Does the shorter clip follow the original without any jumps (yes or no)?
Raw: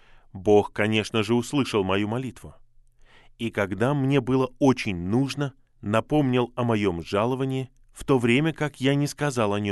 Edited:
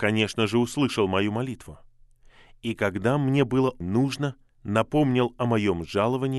no